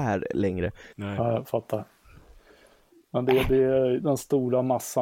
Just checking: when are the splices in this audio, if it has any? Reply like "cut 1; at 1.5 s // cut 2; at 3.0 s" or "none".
cut 1; at 0.9 s // cut 2; at 4.0 s